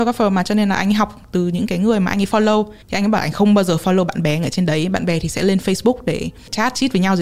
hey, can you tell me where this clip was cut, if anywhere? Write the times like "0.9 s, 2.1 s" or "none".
2.8 s